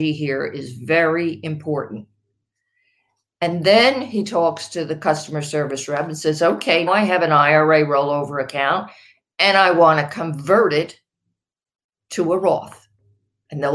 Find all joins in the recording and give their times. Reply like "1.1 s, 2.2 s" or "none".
6.9 s